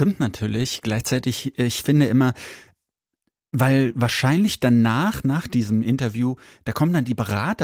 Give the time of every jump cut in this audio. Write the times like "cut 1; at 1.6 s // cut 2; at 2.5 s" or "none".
none